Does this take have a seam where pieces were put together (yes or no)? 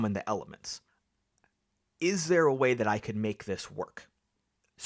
no